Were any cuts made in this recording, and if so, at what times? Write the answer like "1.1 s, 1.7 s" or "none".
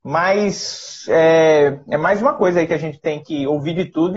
none